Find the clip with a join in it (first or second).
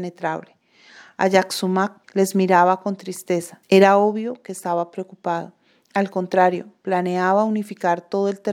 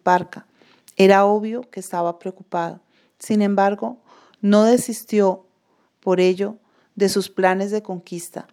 first